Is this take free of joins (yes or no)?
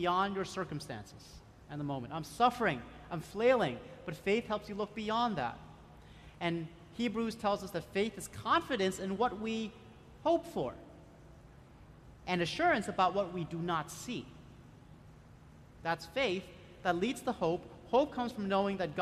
yes